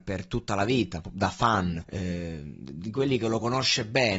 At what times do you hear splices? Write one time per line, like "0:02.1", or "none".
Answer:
0:01.8

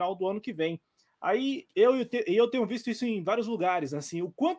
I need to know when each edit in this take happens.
0:01.7

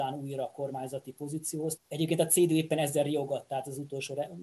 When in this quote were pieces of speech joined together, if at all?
0:01.8

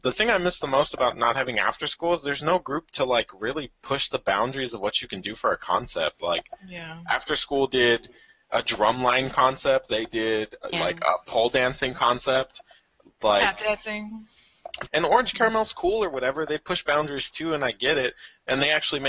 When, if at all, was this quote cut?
0:10.7
0:14.9

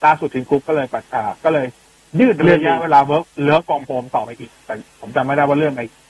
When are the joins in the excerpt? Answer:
0:04.6

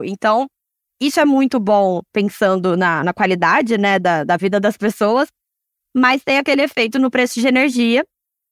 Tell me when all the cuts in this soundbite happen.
none

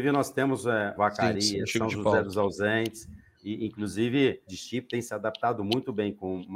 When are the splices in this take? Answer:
0:01.0
0:03.4
0:04.5

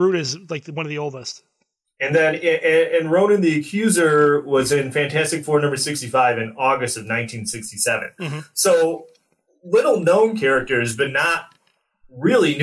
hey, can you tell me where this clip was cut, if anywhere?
none

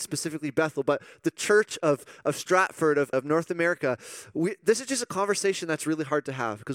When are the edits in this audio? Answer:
0:03.1

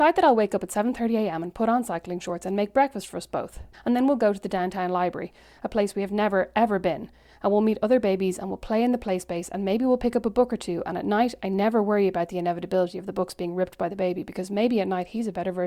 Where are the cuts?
0:03.7

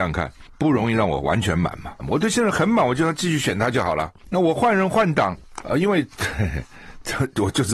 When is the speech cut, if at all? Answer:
0:02.0
0:04.2
0:05.6

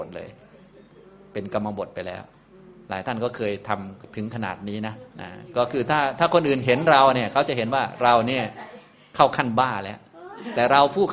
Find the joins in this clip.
0:05.1

